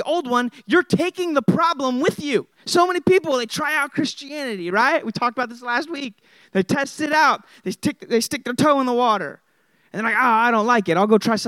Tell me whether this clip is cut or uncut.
cut